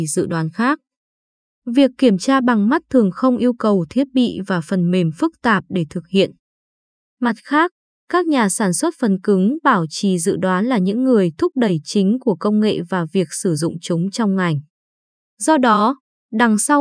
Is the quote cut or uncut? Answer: uncut